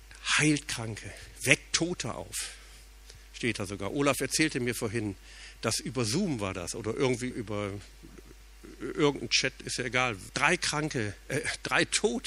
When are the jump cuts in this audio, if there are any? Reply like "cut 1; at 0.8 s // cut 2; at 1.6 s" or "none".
cut 1; at 7.3 s // cut 2; at 10.3 s